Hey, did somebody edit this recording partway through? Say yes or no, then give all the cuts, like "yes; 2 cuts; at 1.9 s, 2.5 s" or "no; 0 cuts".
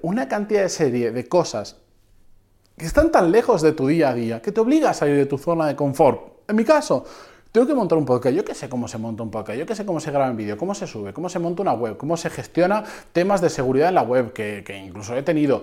no; 0 cuts